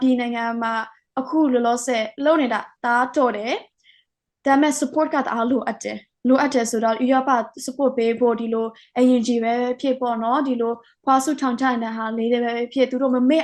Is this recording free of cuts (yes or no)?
no